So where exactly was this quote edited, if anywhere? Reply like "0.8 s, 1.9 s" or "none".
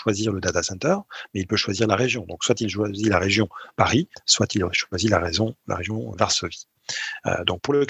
4.1 s, 6.1 s